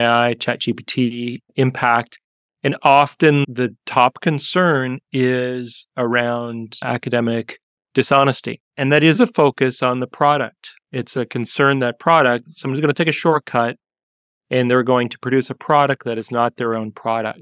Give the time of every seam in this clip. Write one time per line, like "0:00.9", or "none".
none